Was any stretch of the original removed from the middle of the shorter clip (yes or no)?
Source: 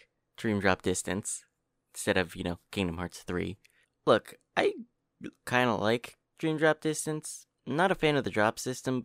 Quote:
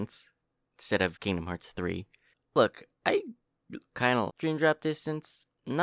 yes